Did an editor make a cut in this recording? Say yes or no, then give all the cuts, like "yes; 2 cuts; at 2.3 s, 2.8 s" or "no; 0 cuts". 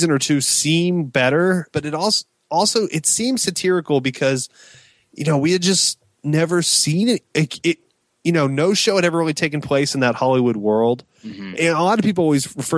yes; 2 cuts; at 1.7 s, 11.5 s